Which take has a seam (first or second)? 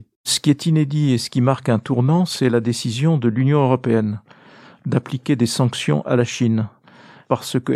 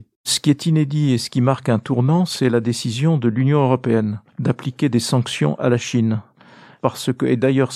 second